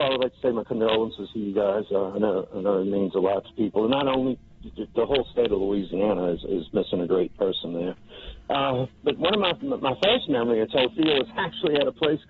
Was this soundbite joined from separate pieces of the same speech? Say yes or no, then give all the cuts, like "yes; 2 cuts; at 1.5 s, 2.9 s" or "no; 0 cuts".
yes; 1 cut; at 8.9 s